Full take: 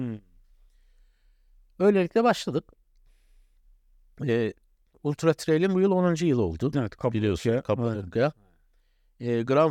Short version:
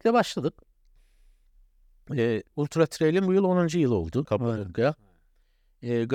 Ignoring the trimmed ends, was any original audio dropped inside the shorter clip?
yes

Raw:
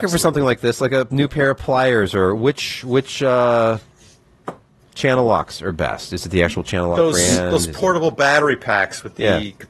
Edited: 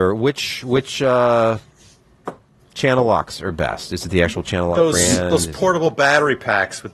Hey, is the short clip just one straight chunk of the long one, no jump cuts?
yes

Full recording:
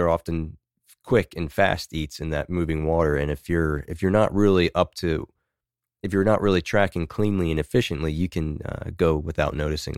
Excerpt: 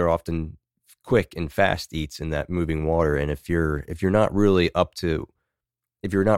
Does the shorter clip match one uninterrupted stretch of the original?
yes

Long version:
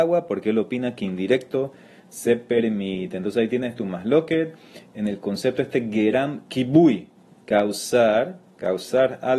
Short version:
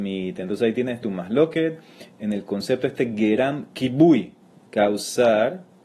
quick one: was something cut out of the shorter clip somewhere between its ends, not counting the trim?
no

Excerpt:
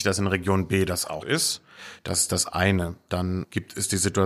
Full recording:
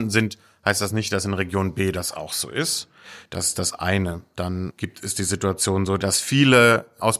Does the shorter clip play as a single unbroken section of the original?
no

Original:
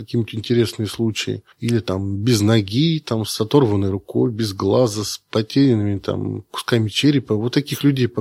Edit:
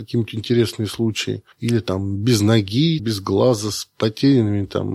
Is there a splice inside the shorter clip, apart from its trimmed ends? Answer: yes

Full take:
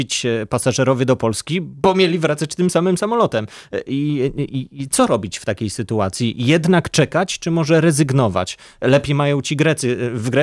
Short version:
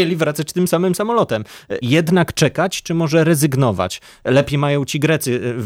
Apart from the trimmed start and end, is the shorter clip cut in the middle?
yes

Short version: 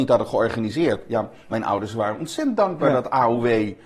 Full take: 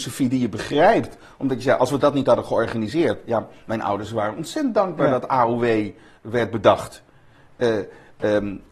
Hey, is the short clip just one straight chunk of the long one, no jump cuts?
yes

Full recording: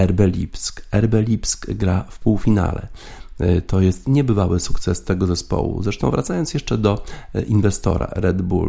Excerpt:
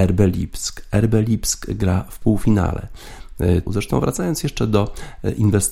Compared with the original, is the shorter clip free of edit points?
no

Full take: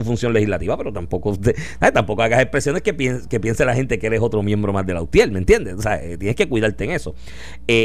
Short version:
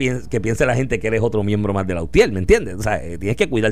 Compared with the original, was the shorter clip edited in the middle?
no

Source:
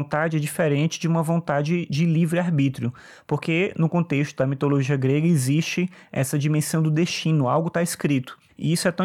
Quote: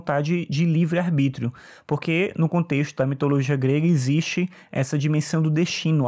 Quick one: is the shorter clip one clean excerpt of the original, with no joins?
yes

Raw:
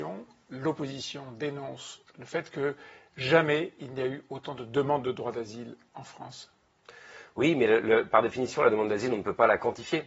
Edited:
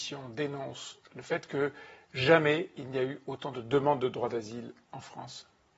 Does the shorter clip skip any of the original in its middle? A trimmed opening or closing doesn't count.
no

